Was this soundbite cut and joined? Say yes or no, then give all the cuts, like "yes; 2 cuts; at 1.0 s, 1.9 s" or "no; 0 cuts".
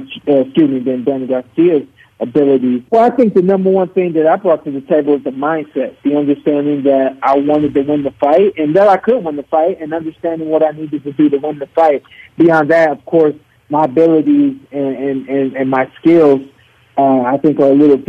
yes; 1 cut; at 2.9 s